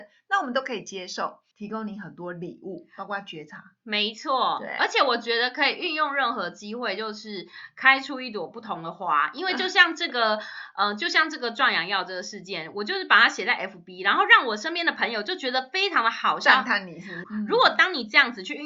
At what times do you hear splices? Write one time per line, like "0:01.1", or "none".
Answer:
0:01.5
0:17.2